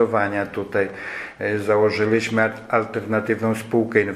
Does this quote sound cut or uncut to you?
uncut